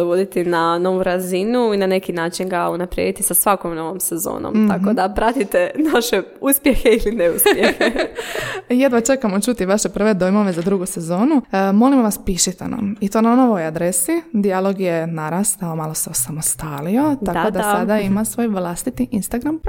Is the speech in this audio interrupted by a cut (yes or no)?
no